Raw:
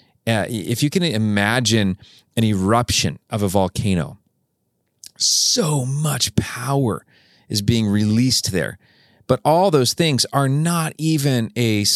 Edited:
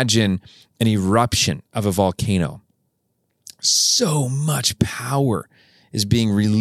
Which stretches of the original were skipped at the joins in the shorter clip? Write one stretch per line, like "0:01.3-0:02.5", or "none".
none